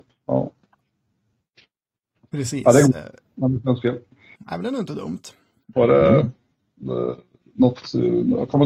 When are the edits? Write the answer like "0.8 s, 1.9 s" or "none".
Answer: 4.4 s, 5.7 s